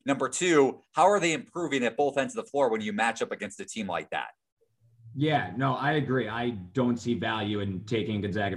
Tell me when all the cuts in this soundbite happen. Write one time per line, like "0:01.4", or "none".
none